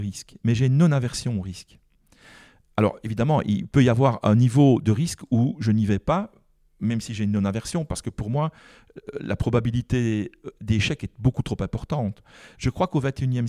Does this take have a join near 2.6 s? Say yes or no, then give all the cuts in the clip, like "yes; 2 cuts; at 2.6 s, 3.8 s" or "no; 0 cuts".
no; 1 cut; at 12.5 s